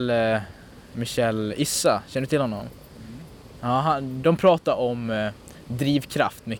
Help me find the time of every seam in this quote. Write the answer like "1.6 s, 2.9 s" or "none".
4.2 s